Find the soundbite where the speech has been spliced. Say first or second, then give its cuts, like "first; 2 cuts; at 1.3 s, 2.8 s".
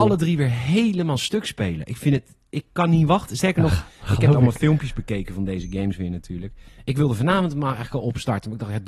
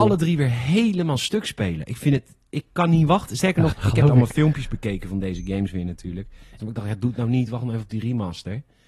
second; 2 cuts; at 3.7 s, 6.6 s